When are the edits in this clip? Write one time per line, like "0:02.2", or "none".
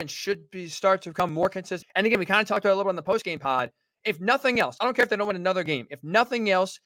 0:01.8